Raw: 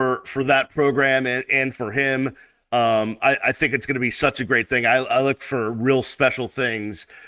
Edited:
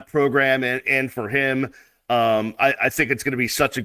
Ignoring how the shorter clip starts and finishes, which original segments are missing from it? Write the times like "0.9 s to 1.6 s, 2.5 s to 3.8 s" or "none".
none